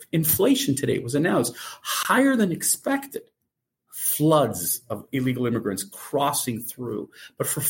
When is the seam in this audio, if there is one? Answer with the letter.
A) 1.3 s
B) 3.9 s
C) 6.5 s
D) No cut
B